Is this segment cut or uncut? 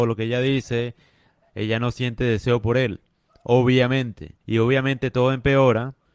cut